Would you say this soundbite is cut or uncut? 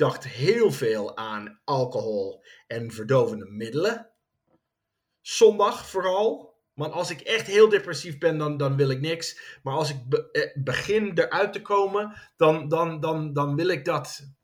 uncut